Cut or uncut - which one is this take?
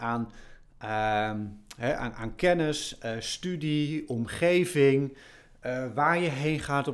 uncut